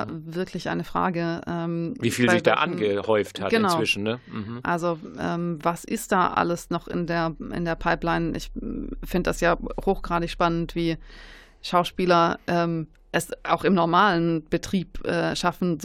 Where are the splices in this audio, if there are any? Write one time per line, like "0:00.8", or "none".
none